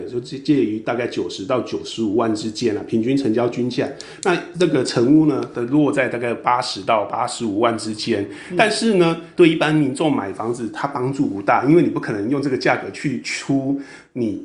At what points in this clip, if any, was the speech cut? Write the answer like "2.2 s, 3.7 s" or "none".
9.4 s